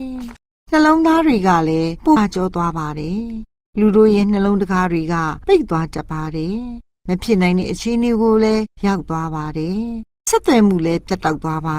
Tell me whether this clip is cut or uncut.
cut